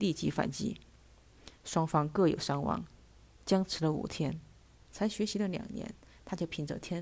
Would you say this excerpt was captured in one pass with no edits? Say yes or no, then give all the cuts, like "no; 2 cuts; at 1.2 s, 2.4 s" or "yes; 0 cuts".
no; 1 cut; at 4.8 s